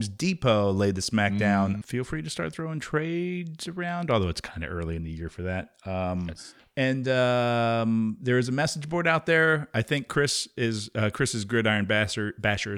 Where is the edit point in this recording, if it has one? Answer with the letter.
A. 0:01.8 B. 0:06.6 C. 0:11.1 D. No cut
A